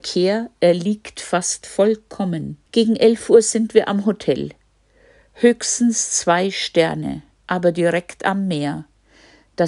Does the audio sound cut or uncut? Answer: cut